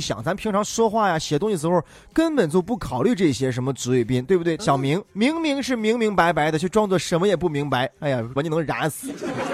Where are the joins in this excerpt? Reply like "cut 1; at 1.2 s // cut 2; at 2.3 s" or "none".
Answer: cut 1; at 4.6 s // cut 2; at 8.4 s